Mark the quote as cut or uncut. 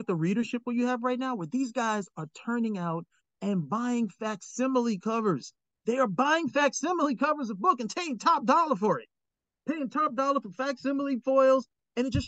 uncut